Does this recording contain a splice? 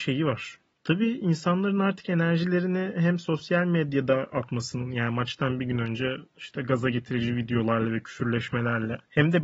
no; 0 cuts

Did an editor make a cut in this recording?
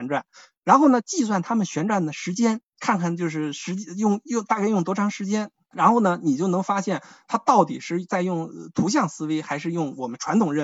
no; 0 cuts

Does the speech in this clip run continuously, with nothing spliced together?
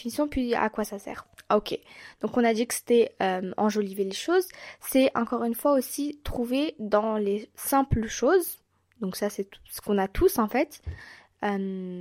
yes; 0 cuts

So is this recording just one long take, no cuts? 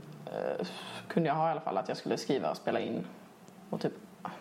yes; 0 cuts

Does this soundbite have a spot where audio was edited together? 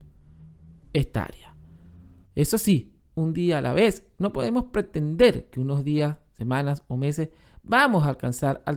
yes; 1 cut; at 2.2 s

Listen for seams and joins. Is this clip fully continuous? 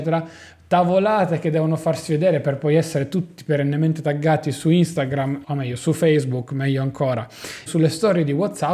no; 2 cuts; at 5.4 s, 7.7 s

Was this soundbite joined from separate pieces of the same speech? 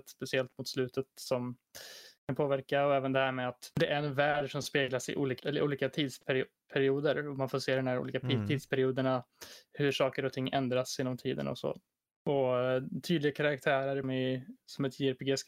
yes; 2 cuts; at 5.4 s, 14.0 s

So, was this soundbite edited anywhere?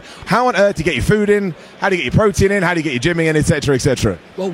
no; 0 cuts

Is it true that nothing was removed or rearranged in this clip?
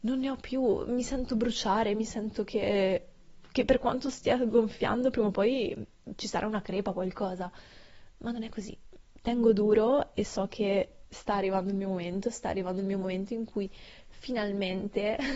yes; 0 cuts

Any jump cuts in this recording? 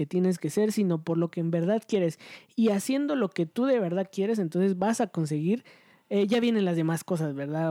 no; 0 cuts

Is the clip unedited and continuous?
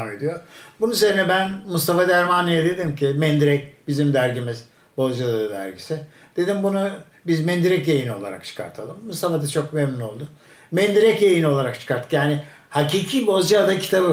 yes; 0 cuts

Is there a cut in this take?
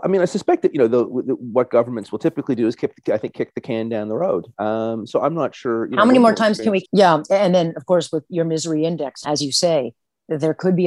yes; 2 cuts; at 6.8 s, 9.2 s

